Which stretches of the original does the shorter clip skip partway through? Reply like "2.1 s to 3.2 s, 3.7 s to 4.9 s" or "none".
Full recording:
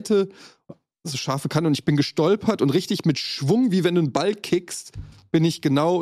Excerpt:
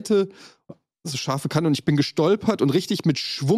none